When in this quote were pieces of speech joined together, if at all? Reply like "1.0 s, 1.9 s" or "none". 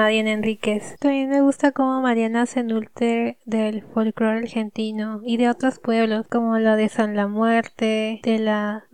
1.0 s, 6.3 s